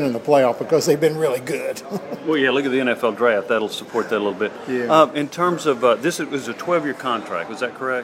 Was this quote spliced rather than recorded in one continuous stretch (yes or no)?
no